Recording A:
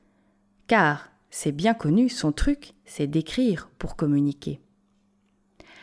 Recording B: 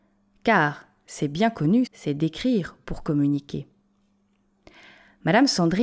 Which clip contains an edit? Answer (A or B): B